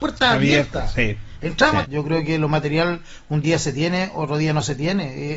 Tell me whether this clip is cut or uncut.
cut